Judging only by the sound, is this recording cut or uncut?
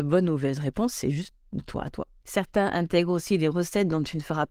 cut